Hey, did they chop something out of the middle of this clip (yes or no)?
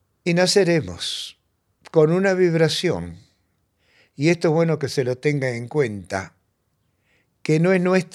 no